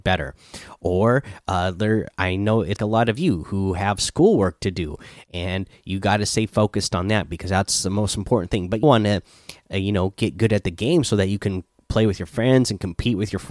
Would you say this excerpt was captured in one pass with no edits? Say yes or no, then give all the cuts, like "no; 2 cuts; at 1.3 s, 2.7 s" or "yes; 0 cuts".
no; 2 cuts; at 2.8 s, 8.8 s